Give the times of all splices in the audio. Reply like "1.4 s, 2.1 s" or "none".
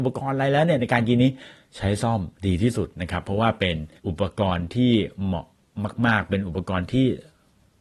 2.4 s, 4.0 s